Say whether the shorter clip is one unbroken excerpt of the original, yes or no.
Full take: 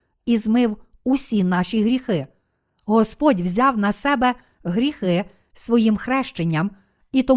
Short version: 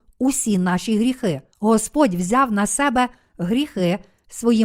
no